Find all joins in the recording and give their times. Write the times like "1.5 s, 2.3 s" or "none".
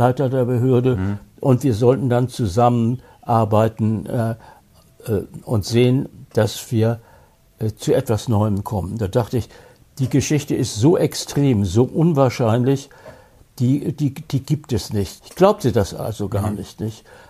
15.2 s